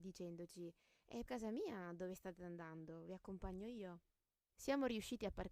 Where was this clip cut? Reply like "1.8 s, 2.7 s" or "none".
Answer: 1.3 s, 4.5 s